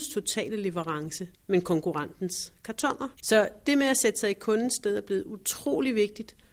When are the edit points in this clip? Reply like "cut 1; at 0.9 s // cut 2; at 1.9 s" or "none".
cut 1; at 1.3 s // cut 2; at 3.1 s